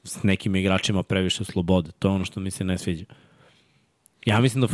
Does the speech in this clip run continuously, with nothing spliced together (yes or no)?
yes